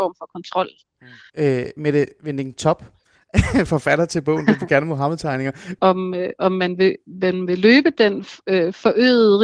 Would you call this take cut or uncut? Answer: cut